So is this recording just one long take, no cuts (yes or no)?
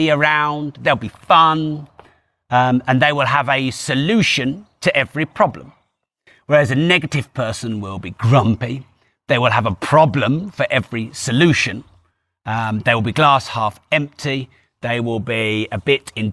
yes